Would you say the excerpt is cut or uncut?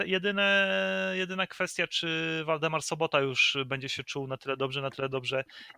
uncut